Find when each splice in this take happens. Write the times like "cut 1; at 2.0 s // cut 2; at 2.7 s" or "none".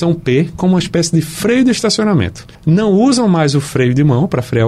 cut 1; at 2.5 s